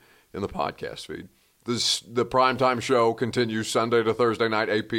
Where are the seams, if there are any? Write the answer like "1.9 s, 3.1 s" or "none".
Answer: none